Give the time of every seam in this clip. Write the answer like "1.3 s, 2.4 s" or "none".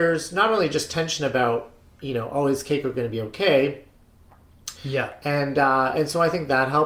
4.8 s